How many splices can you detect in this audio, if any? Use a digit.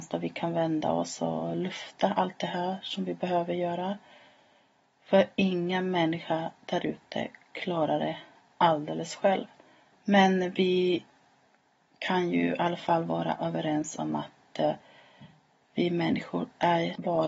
1